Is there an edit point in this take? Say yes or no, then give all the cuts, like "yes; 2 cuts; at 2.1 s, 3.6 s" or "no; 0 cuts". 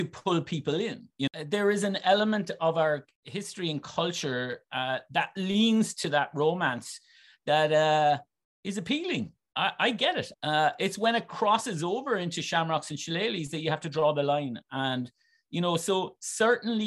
yes; 1 cut; at 10.3 s